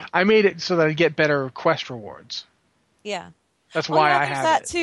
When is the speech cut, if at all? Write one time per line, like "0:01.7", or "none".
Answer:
none